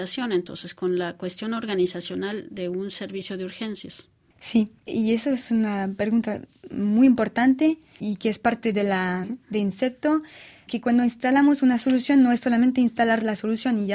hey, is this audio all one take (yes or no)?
no